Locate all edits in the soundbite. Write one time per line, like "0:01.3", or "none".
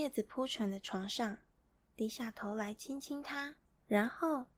0:03.7

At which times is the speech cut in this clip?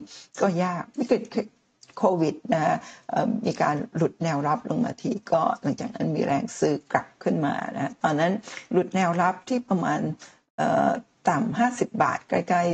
none

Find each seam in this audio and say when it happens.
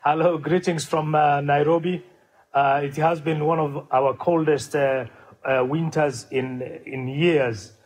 none

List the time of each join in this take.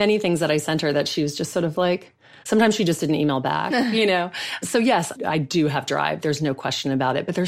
0:02.4

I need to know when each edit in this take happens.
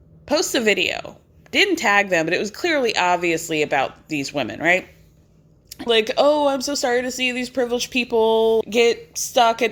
0:05.9
0:08.6

